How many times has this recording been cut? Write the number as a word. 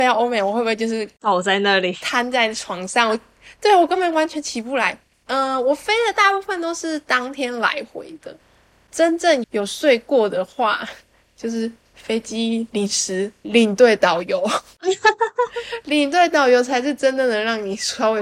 two